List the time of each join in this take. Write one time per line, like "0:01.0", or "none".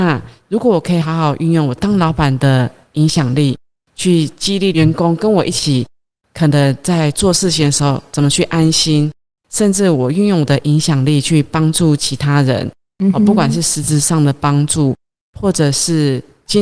none